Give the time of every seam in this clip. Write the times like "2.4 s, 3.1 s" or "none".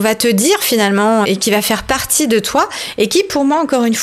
1.2 s